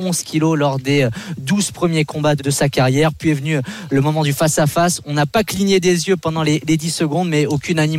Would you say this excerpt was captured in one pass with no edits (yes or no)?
no